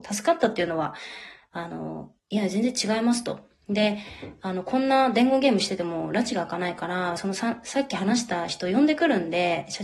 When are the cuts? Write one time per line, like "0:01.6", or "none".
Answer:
none

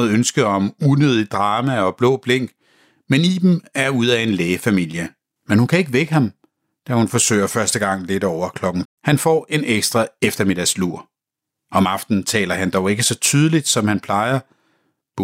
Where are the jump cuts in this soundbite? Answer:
0:05.4
0:08.8

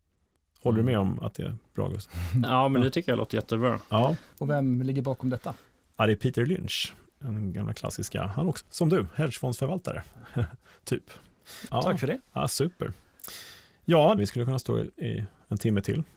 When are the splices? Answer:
0:08.6
0:11.7
0:14.2

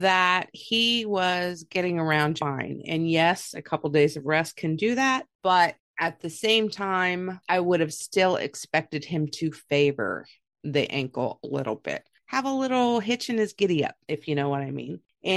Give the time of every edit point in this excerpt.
0:02.4

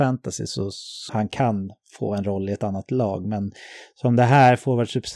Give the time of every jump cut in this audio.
0:01.1

